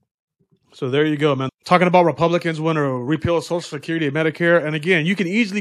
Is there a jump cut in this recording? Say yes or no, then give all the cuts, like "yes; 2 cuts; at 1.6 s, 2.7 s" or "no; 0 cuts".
yes; 1 cut; at 1.5 s